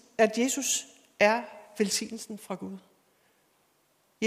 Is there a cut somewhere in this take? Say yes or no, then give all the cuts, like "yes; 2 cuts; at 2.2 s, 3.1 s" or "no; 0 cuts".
no; 0 cuts